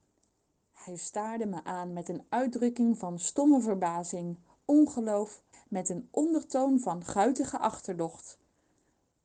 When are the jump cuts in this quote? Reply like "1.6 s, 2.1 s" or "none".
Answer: 5.5 s